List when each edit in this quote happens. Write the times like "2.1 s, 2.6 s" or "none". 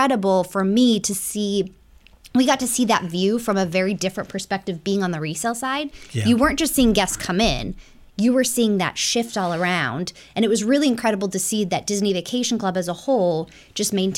none